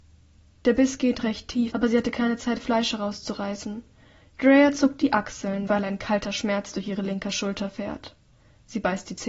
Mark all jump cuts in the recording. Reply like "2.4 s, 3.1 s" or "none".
1.7 s, 4.2 s, 5.7 s

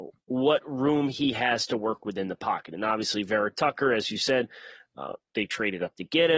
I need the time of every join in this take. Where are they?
none

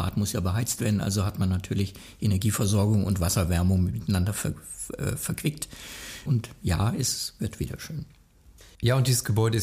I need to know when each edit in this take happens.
6.3 s

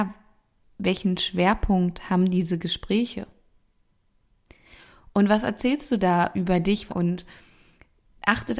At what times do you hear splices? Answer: 6.9 s

